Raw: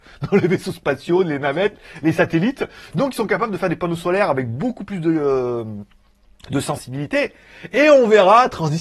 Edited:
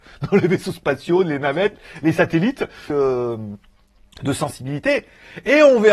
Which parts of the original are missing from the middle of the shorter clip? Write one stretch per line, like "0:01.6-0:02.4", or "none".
0:02.9-0:05.2